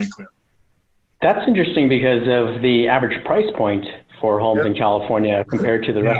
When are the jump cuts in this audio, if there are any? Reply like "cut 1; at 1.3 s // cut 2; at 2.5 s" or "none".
none